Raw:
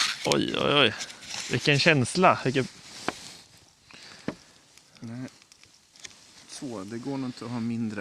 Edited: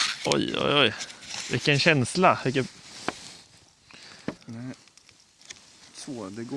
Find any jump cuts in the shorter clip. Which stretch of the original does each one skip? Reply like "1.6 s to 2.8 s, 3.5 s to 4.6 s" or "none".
4.4 s to 4.9 s